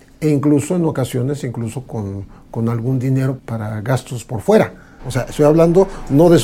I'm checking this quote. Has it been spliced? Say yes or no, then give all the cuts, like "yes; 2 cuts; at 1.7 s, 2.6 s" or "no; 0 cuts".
yes; 1 cut; at 5.0 s